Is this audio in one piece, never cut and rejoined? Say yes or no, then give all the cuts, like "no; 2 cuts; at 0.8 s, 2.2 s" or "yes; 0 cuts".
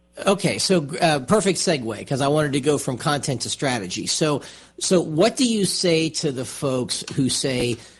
yes; 0 cuts